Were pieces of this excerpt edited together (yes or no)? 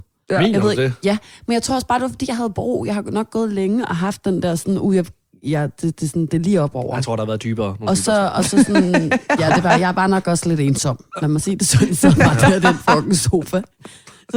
no